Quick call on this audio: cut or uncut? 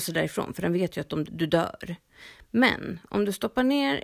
cut